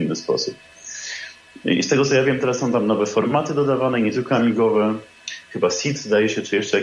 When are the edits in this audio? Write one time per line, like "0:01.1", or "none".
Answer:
none